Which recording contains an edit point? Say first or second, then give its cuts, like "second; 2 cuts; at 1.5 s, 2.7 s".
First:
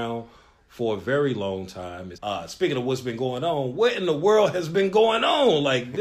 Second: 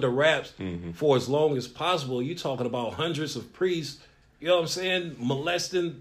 first; 1 cut; at 2.1 s